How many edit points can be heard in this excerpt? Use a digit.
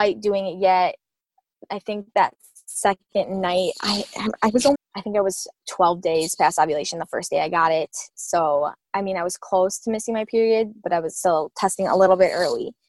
1